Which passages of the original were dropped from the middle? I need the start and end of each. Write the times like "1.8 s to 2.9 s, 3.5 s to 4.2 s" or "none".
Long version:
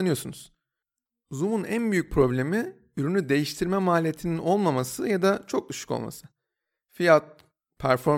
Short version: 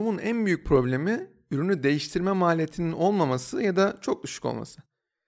none